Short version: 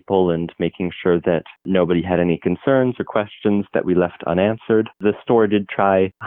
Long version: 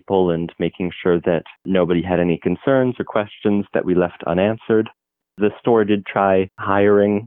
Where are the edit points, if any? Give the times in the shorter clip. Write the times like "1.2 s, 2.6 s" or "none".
4.9 s